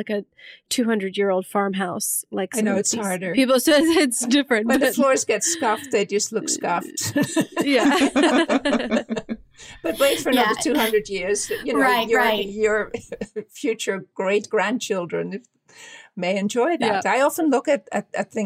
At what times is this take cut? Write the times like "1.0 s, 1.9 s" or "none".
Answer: none